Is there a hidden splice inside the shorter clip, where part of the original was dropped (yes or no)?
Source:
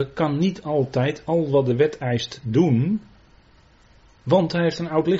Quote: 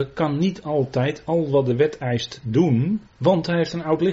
yes